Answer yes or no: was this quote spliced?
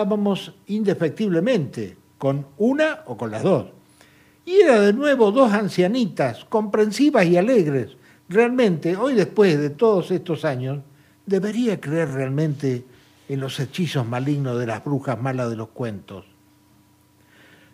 no